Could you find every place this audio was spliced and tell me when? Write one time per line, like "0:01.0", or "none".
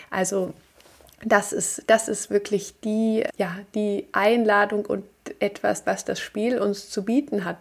0:03.3
0:05.8